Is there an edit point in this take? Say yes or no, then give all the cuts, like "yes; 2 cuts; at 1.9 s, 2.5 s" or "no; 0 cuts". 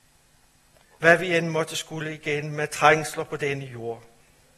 yes; 1 cut; at 0.9 s